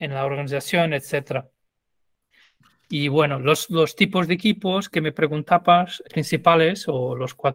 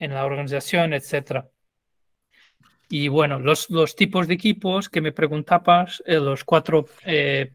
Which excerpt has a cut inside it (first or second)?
first